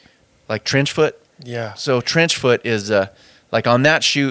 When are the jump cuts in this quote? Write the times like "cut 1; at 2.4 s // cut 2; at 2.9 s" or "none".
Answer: none